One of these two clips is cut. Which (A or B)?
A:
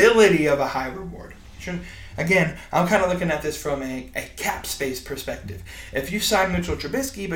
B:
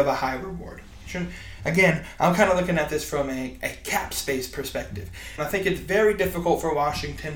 B